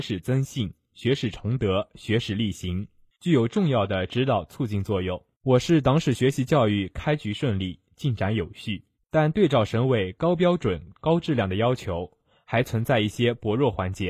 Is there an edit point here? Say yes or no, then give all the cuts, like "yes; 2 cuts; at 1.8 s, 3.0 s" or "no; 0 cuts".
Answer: yes; 2 cuts; at 5.3 s, 8.9 s